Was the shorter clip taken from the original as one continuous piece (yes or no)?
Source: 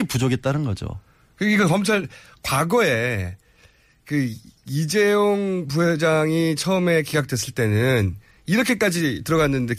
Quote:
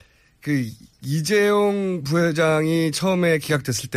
yes